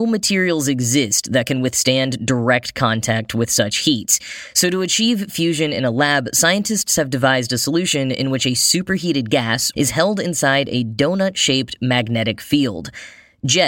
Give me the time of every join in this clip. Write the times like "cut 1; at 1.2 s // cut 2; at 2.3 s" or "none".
cut 1; at 9.7 s